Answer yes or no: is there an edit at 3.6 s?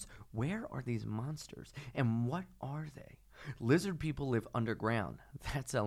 no